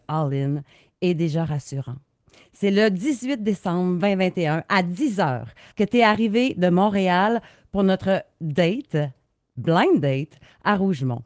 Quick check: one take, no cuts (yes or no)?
no